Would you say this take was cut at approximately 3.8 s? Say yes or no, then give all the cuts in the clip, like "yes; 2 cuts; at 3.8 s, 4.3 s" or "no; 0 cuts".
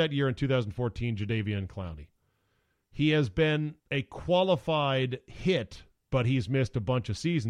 yes; 1 cut; at 3.8 s